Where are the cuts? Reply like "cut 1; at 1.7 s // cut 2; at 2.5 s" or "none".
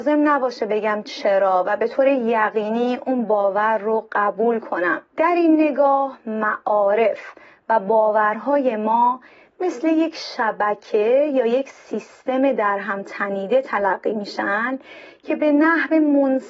cut 1; at 5.1 s